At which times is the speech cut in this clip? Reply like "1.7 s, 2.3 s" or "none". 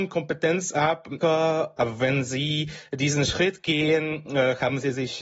1.2 s